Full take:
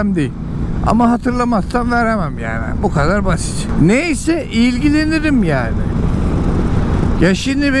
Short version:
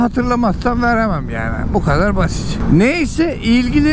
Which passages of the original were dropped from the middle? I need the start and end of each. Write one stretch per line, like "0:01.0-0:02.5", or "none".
none